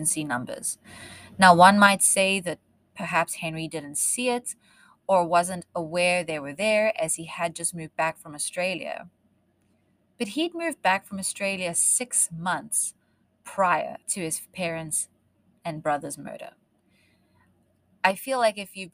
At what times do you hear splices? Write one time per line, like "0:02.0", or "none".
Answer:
0:14.0